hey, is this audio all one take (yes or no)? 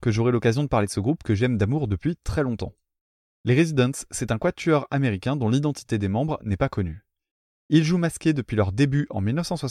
yes